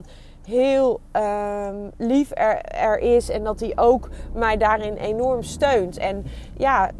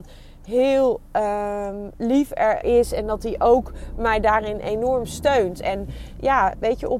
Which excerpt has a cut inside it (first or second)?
second